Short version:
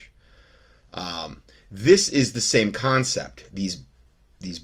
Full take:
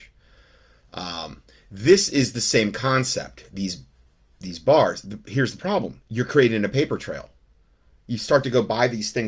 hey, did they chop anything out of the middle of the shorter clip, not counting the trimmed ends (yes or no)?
no